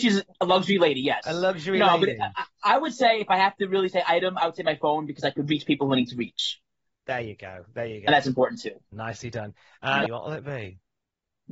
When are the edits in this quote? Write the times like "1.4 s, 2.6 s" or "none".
8.9 s, 10.1 s